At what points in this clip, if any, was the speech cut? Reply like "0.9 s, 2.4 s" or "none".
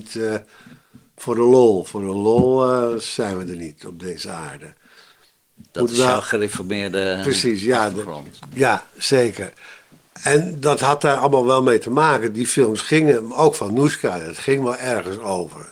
none

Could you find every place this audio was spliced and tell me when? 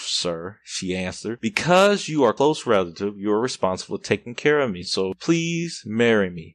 none

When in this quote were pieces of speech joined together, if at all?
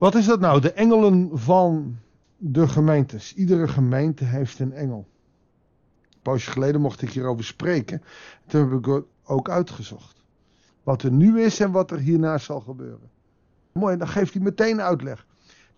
10.7 s, 13.8 s

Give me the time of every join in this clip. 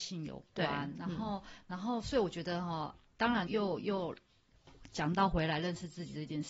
3.5 s

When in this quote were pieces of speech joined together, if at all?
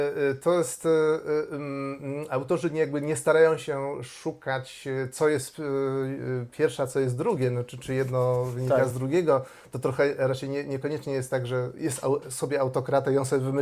none

